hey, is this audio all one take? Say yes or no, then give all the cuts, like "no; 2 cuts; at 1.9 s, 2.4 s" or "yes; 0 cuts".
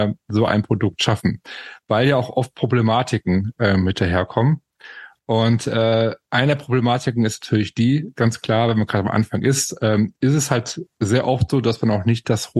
yes; 0 cuts